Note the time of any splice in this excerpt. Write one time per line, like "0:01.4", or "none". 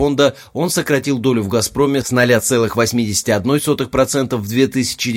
none